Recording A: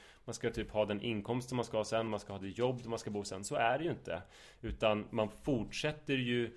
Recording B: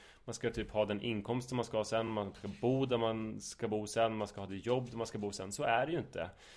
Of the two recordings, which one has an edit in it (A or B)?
A